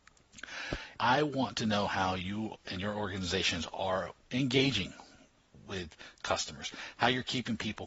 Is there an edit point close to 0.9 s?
yes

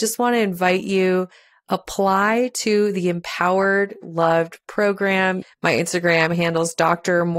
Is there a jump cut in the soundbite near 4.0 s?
yes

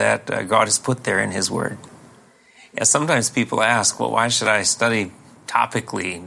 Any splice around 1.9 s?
no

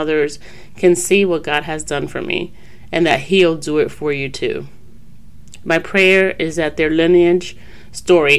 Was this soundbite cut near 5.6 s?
no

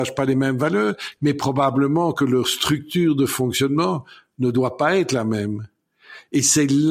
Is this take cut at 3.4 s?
no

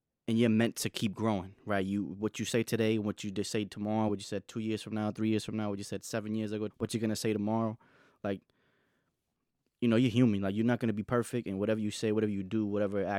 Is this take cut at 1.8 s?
no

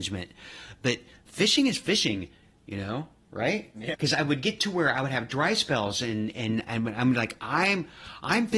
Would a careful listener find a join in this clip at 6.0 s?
no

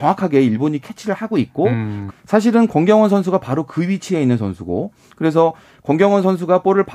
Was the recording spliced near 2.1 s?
yes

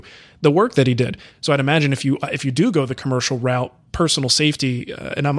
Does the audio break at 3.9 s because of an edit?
no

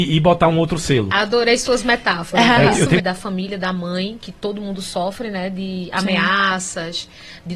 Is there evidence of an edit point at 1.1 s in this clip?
no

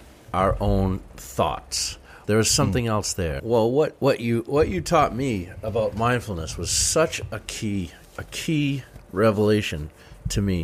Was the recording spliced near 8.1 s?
no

